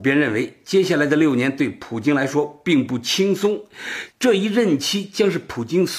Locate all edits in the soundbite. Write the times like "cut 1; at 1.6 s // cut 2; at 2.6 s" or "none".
cut 1; at 4.1 s